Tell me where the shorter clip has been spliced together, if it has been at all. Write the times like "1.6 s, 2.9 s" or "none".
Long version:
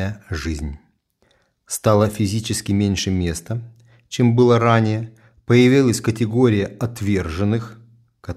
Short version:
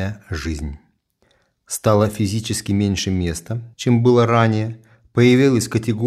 3.7 s